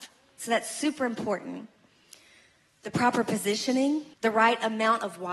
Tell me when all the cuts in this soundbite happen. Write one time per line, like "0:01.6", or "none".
0:04.1